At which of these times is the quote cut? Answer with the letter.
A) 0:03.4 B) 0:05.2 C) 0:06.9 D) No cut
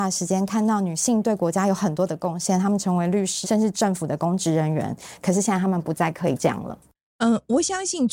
A